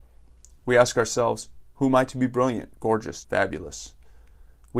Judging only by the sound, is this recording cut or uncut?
cut